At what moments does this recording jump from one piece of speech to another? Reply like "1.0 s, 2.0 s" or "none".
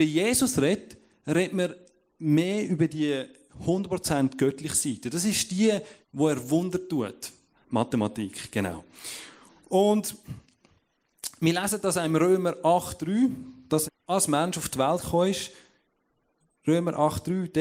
6.0 s, 7.5 s, 13.9 s